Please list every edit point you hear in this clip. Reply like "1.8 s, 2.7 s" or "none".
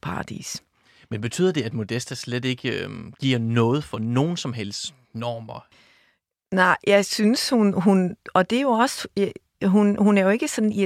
none